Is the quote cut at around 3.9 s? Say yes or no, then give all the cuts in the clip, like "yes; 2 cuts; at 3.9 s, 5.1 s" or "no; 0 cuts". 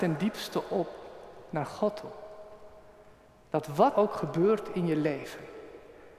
yes; 1 cut; at 3.9 s